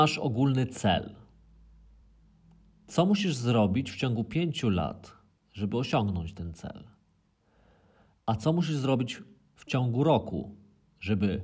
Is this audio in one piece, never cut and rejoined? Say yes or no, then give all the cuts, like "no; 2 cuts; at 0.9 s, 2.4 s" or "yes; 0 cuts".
yes; 0 cuts